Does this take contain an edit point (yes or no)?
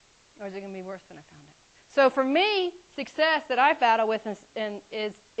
yes